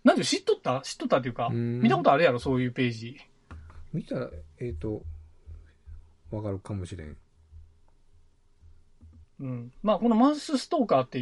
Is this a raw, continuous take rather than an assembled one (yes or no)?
no